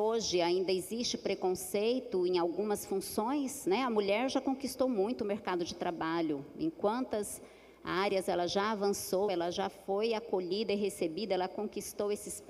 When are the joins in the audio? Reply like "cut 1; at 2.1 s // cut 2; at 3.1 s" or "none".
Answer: cut 1; at 9.3 s